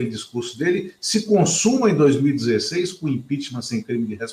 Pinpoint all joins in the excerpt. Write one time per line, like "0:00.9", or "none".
none